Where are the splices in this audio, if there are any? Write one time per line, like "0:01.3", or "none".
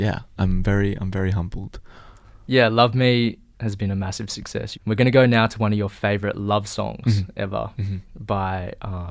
0:04.7